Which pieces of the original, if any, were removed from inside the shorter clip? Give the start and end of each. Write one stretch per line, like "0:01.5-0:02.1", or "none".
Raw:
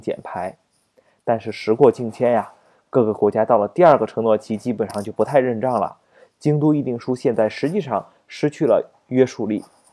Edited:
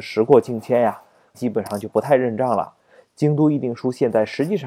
0:02.8-0:04.6